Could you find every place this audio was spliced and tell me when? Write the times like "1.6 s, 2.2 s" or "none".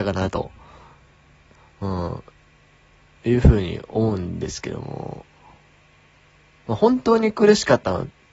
none